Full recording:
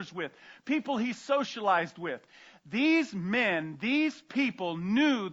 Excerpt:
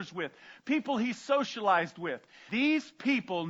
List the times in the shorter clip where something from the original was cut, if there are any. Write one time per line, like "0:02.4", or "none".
0:02.5